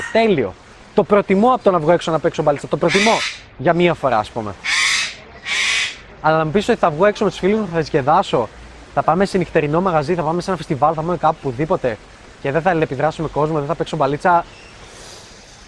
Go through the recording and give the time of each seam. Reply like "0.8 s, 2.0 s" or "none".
none